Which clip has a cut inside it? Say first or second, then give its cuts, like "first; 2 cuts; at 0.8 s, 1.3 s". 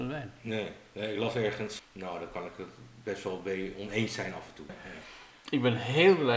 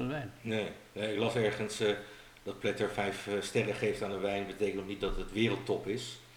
first; 2 cuts; at 1.8 s, 4.7 s